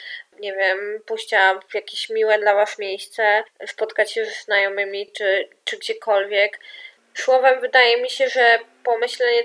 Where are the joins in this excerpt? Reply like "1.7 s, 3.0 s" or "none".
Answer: none